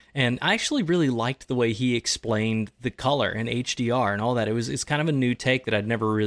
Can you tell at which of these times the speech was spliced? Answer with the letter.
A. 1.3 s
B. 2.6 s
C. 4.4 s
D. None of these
D